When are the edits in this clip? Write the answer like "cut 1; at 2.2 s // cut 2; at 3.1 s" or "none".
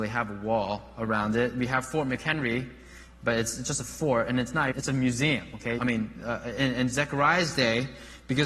cut 1; at 4.7 s // cut 2; at 5.8 s